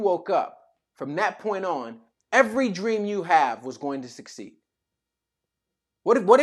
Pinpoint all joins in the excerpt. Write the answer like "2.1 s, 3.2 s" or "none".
2.1 s